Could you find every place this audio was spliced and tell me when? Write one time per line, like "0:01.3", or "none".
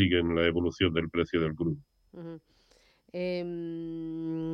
none